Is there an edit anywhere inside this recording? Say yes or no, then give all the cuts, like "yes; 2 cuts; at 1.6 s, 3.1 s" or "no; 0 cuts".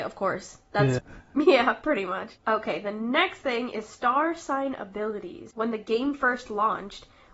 yes; 1 cut; at 1.0 s